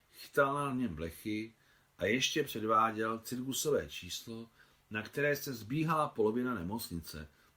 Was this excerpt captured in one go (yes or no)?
yes